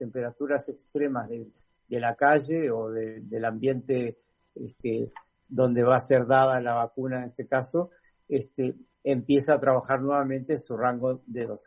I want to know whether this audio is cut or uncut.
uncut